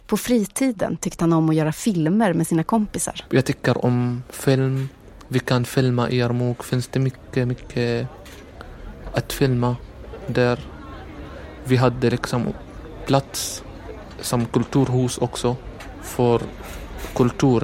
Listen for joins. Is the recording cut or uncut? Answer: uncut